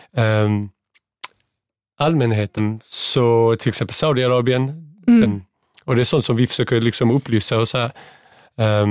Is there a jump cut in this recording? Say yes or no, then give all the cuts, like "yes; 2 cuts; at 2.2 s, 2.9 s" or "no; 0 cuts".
yes; 2 cuts; at 2.6 s, 5.2 s